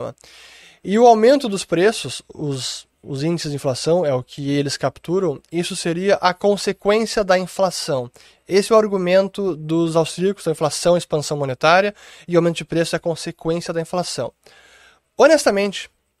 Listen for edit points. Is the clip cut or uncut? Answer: uncut